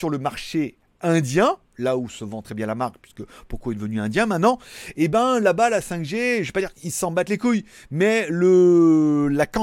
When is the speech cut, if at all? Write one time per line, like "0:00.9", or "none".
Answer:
0:02.4